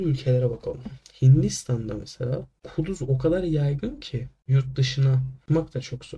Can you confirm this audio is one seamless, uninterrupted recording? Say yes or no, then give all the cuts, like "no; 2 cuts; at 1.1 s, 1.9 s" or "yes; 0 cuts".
yes; 0 cuts